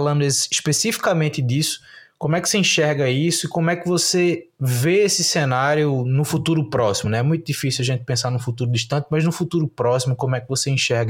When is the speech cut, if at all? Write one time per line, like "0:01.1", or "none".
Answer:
none